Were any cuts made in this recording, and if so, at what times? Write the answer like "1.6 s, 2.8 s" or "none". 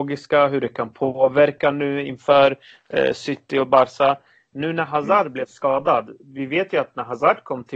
none